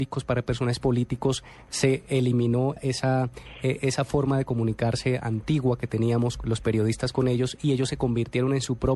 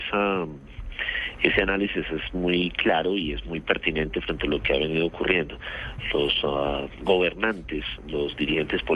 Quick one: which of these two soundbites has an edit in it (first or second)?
first